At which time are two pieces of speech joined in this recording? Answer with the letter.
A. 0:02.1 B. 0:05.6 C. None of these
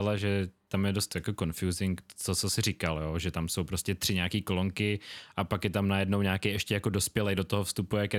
C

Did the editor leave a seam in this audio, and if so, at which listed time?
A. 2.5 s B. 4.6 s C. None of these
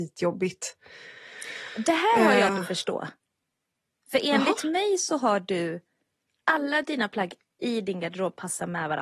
A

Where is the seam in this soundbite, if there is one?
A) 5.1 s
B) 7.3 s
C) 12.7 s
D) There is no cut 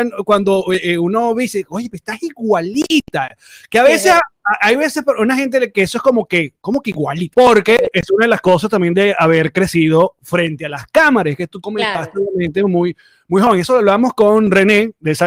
B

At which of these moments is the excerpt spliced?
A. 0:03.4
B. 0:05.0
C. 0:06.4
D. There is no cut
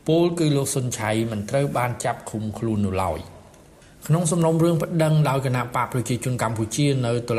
D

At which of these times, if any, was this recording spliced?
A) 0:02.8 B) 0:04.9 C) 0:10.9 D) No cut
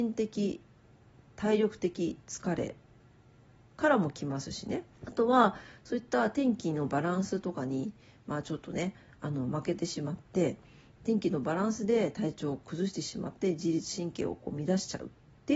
B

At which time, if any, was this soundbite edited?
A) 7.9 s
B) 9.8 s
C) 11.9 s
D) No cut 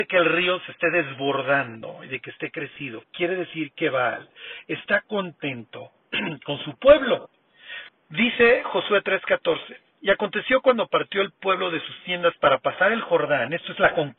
A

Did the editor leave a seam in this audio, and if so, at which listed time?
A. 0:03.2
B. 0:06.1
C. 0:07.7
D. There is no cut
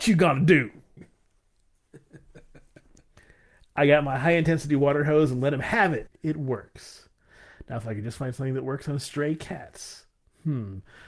B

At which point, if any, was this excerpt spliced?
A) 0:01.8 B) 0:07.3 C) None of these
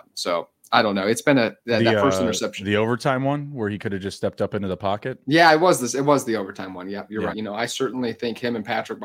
B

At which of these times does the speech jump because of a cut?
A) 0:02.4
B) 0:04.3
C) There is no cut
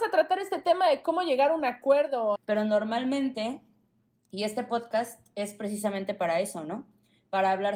A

